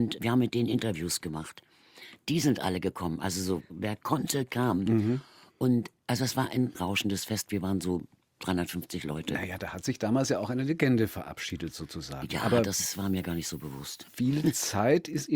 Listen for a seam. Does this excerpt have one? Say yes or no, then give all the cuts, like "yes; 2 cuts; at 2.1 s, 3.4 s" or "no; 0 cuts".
no; 0 cuts